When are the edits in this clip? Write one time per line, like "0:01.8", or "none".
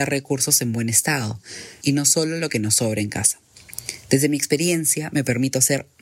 0:01.8